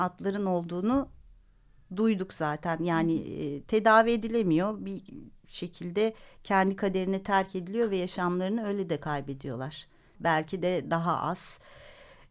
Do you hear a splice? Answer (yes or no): yes